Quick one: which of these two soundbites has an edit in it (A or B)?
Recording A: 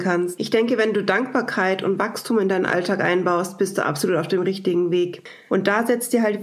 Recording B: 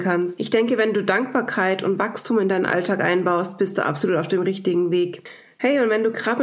A